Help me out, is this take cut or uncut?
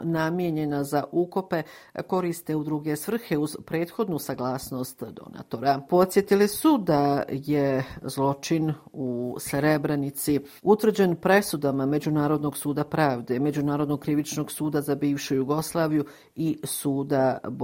cut